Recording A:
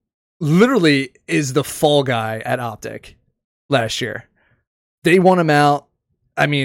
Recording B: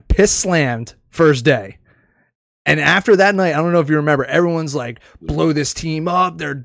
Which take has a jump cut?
A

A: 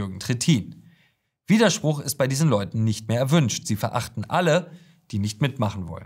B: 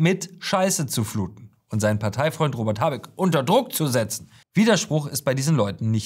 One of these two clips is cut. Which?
B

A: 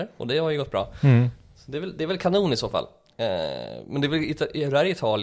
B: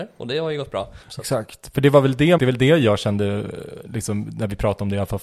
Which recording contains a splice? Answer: B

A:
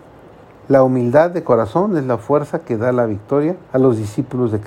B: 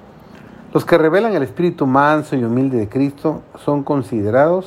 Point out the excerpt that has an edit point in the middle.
A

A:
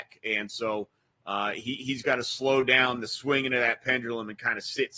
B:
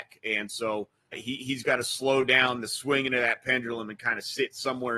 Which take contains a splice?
B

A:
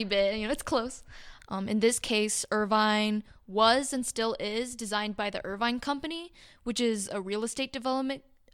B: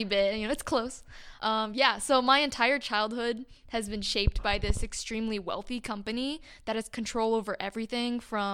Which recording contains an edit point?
A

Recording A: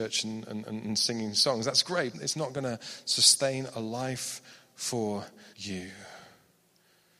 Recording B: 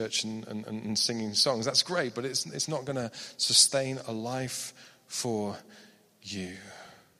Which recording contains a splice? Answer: A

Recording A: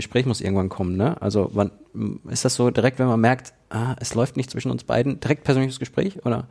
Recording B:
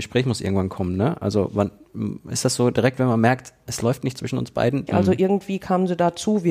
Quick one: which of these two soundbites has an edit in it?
B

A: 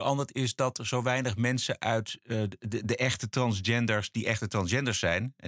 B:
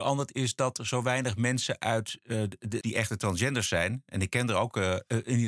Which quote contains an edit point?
B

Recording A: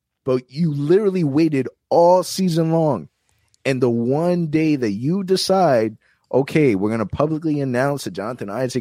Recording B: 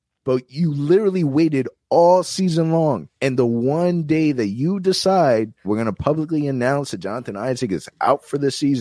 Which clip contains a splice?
B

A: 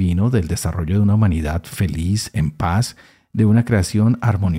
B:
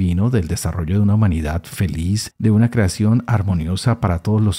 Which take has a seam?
B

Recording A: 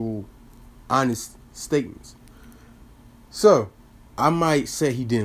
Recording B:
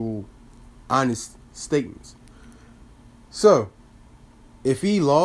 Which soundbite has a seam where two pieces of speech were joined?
A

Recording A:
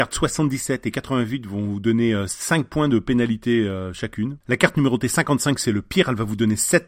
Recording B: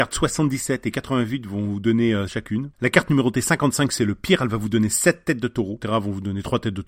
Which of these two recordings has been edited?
B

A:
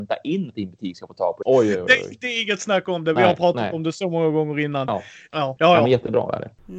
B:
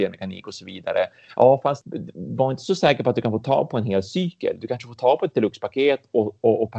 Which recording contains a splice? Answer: A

